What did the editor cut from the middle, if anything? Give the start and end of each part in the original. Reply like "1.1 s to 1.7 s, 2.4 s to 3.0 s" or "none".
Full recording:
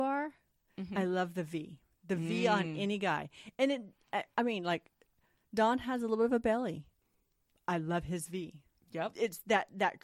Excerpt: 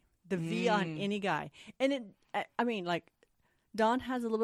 none